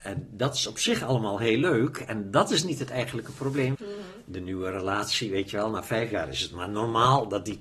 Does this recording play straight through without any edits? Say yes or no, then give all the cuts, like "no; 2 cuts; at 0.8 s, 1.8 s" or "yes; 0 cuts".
no; 1 cut; at 3.7 s